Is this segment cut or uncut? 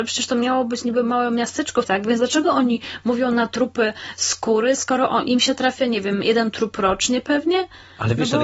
cut